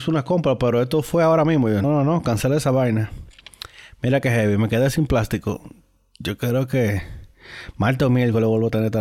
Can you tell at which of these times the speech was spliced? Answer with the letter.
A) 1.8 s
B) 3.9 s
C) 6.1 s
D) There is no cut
A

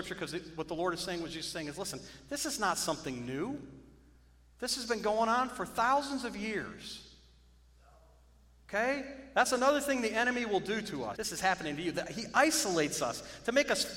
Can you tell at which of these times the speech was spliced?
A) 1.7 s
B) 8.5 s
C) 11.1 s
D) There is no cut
C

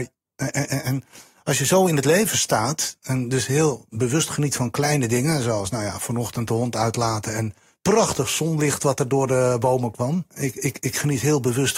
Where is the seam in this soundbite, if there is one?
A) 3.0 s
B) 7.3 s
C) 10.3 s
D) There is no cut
C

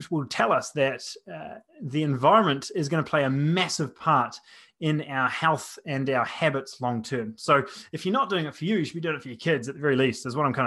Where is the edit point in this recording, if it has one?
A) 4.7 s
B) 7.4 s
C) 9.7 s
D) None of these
D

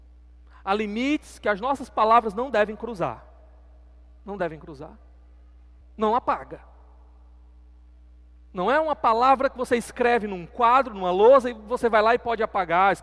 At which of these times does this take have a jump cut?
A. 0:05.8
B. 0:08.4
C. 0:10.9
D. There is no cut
A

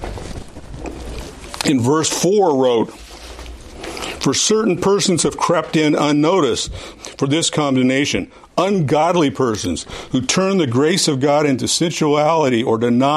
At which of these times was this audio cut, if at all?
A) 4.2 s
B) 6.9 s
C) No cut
B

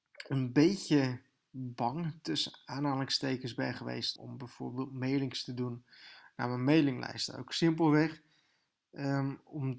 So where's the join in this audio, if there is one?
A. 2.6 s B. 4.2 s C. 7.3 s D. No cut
B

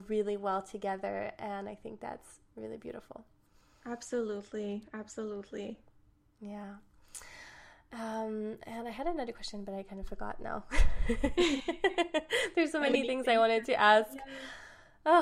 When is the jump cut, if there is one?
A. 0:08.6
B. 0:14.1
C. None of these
C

